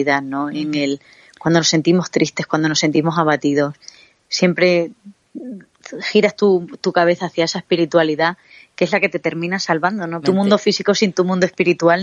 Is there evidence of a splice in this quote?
yes; 1 cut; at 10.2 s

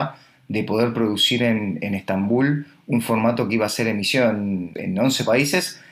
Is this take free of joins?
yes; 0 cuts

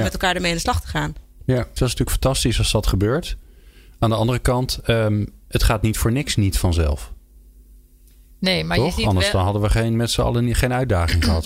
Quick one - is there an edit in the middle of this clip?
yes; 1 cut; at 1.8 s

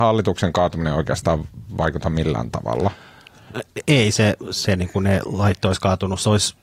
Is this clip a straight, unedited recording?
yes; 0 cuts

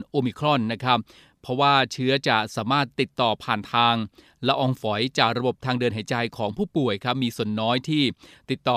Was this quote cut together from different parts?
no; 0 cuts

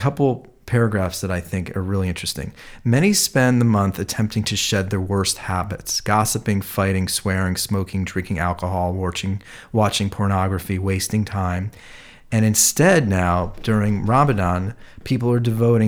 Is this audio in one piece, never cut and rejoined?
yes; 0 cuts

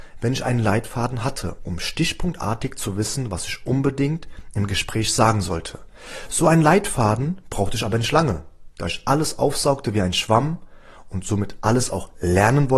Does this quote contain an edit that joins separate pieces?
no; 0 cuts

